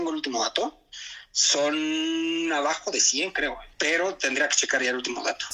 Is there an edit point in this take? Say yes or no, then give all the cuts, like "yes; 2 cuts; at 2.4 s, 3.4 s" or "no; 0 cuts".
yes; 1 cut; at 3.7 s